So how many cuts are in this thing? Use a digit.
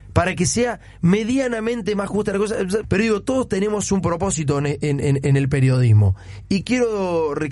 1